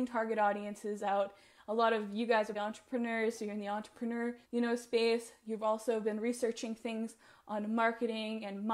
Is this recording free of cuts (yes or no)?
no